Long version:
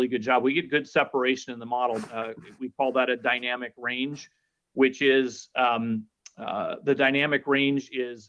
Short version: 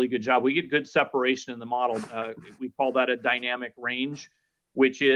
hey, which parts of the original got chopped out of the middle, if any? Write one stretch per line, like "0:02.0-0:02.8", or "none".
none